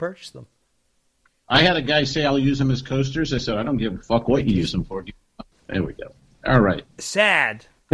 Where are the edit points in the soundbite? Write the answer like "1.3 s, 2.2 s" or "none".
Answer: 5.5 s